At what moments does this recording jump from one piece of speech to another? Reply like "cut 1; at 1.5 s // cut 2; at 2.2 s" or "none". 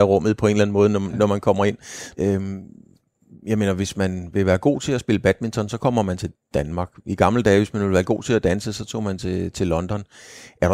cut 1; at 2.1 s